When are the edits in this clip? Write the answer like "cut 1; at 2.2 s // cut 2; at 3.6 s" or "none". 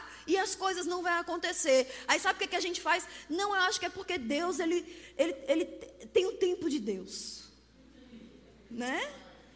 none

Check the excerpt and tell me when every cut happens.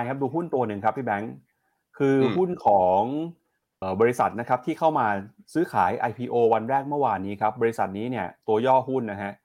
cut 1; at 3.8 s

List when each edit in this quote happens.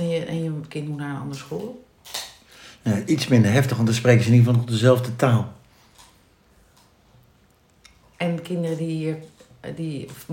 none

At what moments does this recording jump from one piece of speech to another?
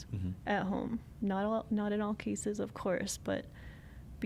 none

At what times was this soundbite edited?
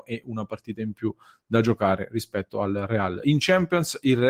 none

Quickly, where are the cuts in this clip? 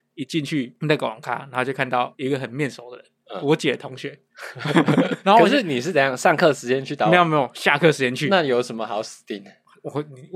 cut 1; at 5.2 s

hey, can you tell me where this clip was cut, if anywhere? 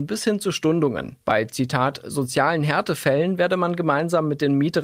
cut 1; at 1.2 s

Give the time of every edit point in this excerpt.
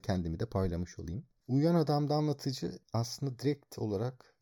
none

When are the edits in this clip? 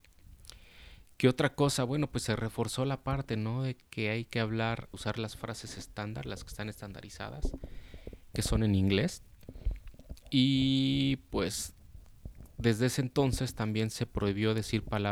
cut 1; at 4.9 s

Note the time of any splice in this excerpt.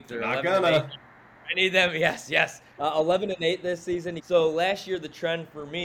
cut 1; at 2.8 s // cut 2; at 4.2 s

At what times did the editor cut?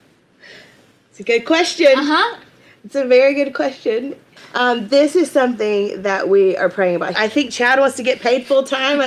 cut 1; at 4.4 s // cut 2; at 7.1 s

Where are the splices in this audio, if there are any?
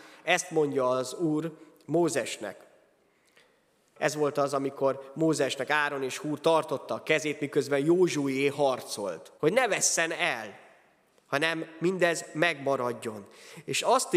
cut 1; at 4.0 s // cut 2; at 9.4 s

